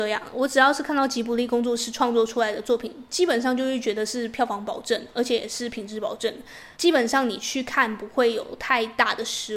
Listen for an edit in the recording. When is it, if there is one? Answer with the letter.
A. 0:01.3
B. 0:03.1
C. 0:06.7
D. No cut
C